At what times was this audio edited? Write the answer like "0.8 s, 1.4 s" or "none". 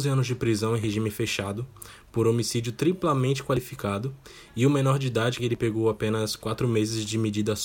5.4 s